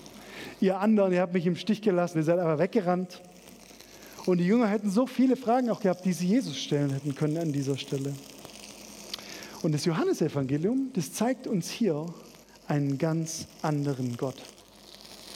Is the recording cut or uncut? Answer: cut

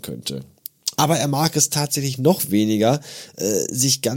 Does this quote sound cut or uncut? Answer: cut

